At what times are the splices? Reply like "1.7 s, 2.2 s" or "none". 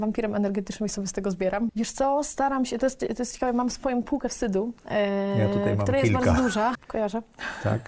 1.7 s, 6.7 s